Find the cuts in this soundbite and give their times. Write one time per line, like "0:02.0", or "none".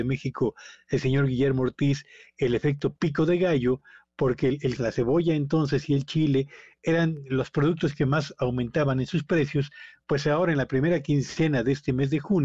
0:04.8